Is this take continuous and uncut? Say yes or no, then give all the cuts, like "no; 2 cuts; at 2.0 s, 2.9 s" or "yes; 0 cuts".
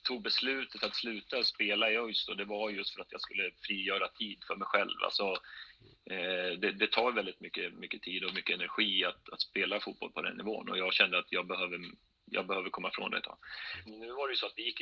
no; 1 cut; at 13.9 s